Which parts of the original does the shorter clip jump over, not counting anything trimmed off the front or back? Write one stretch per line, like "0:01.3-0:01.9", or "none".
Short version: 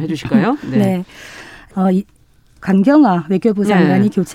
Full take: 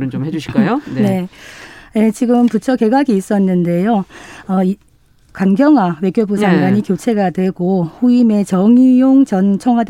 0:01.9-0:04.4